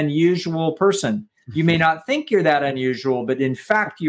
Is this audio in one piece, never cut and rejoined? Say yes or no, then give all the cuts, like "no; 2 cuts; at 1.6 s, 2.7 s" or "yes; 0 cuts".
yes; 0 cuts